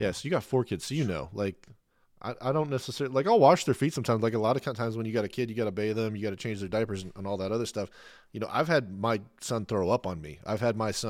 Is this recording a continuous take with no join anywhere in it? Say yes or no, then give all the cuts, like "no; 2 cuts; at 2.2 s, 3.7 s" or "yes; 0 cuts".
yes; 0 cuts